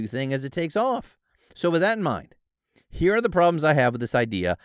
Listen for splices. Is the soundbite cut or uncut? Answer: uncut